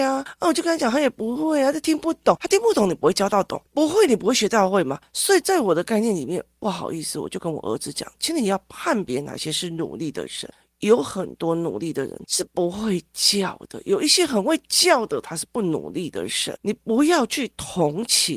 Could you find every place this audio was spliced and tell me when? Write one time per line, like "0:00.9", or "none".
0:12.2